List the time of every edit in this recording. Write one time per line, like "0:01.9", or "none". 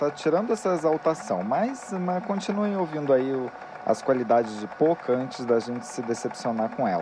none